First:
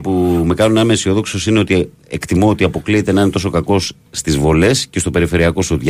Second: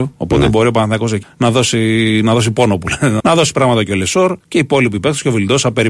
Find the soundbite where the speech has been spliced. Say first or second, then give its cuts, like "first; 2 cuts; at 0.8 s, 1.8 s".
second; 3 cuts; at 1.2 s, 3.2 s, 4.4 s